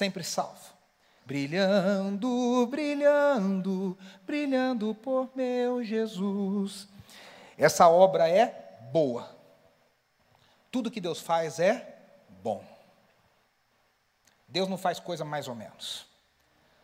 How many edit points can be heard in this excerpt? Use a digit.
1